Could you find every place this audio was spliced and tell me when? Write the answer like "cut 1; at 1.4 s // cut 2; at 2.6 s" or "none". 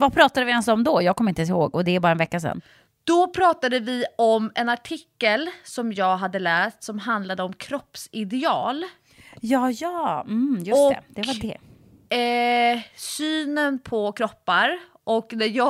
none

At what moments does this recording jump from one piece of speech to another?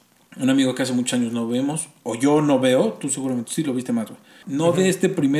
cut 1; at 4.4 s

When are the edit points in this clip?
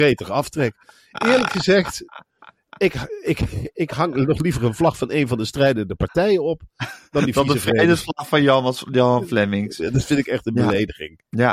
none

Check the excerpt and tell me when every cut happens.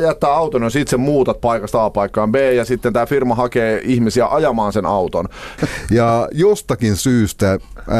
cut 1; at 5.6 s

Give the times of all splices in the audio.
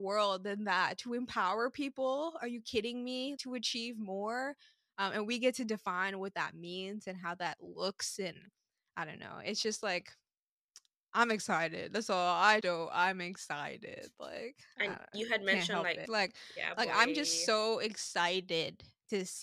cut 1; at 3.4 s // cut 2; at 12.6 s // cut 3; at 16.1 s

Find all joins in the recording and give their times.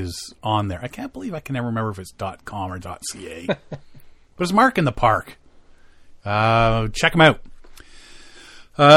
none

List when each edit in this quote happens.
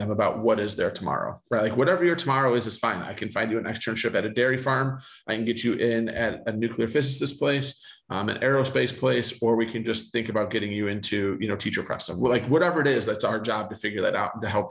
none

